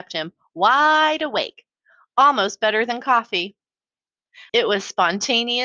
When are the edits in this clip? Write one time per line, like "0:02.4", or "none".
0:04.5